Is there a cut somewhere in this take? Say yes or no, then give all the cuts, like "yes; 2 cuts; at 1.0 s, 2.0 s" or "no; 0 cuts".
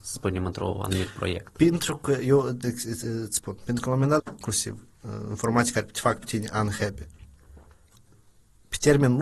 yes; 2 cuts; at 2.6 s, 4.2 s